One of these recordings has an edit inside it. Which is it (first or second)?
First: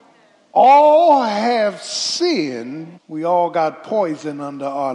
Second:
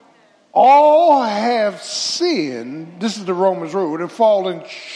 first